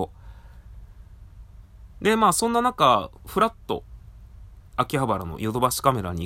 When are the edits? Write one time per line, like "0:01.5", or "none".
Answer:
0:01.9
0:04.7